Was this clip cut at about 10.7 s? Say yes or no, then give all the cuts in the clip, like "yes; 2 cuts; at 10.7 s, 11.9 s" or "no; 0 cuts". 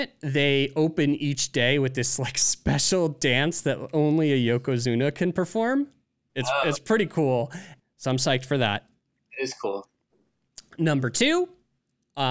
no; 1 cut; at 7.8 s